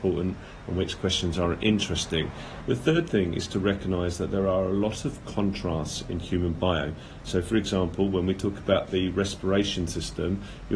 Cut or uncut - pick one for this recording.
cut